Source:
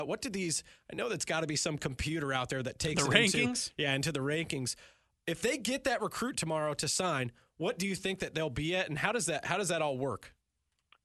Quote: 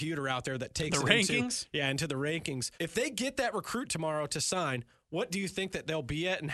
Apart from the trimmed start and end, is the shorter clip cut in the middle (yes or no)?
yes